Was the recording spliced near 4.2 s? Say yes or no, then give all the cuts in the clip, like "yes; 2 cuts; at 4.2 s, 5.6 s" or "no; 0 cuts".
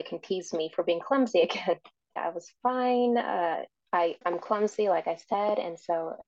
yes; 2 cuts; at 2.2 s, 4.2 s